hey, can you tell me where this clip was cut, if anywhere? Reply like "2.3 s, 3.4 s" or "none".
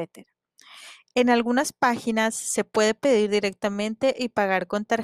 none